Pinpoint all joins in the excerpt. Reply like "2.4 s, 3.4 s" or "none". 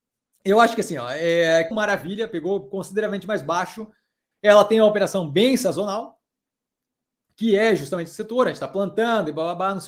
1.7 s, 4.3 s